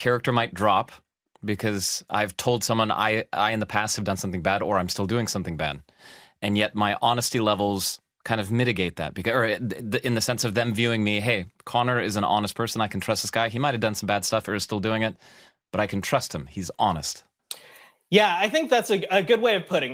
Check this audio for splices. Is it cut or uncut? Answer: uncut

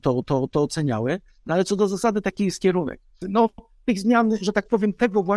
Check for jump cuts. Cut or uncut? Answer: cut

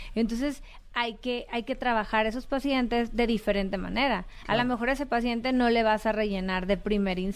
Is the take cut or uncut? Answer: uncut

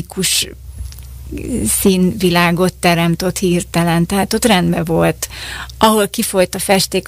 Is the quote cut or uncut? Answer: uncut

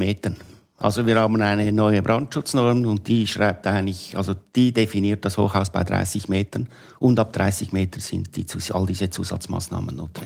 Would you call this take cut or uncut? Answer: uncut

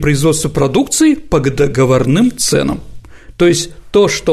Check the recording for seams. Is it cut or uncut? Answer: uncut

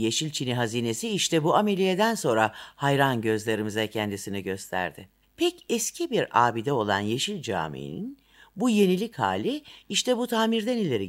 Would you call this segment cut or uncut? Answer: cut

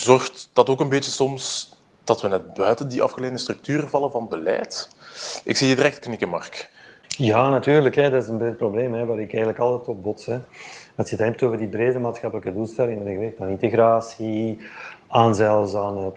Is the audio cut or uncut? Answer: uncut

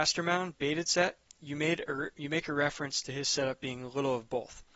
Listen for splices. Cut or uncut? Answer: uncut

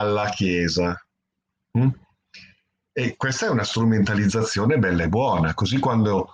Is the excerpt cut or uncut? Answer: uncut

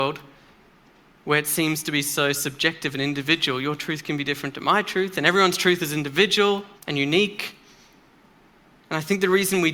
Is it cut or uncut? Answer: cut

